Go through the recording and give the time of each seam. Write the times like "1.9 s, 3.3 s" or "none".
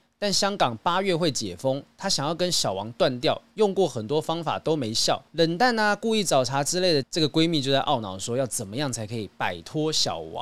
5.3 s, 7.0 s